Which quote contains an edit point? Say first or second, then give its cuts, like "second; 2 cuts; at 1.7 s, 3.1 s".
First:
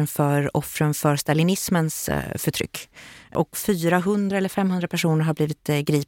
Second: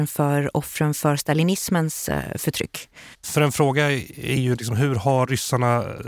second; 1 cut; at 3.1 s